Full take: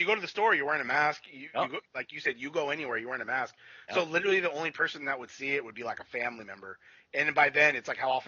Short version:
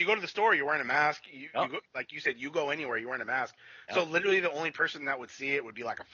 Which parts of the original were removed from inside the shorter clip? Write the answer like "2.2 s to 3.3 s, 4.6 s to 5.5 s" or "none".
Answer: none